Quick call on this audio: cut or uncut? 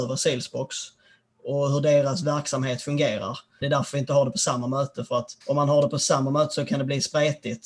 cut